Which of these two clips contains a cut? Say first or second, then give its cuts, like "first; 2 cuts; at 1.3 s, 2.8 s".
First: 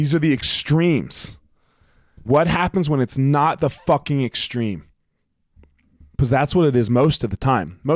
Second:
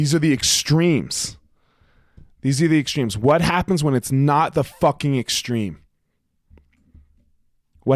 first; 2 cuts; at 2.3 s, 6.1 s